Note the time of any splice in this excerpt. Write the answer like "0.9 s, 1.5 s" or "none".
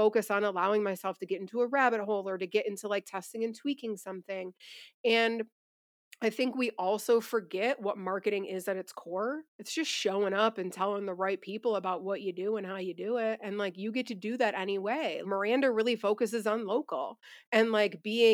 9.5 s, 15.2 s